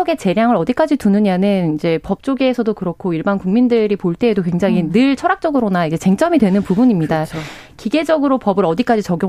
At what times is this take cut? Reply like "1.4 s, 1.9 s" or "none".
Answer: none